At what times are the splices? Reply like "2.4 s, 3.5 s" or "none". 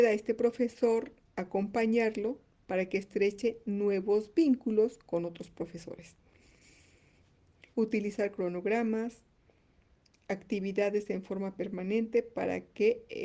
7.7 s